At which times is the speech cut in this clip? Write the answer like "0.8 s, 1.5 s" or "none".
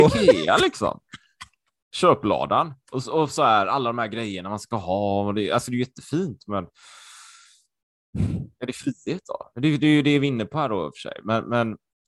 none